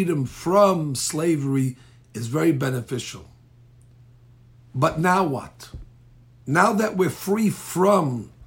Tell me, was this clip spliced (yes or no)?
no